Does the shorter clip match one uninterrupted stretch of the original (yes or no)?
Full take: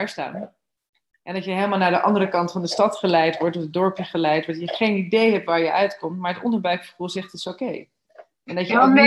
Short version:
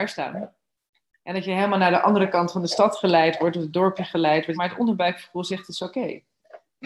no